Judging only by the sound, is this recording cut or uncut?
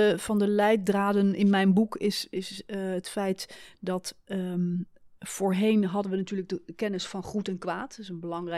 uncut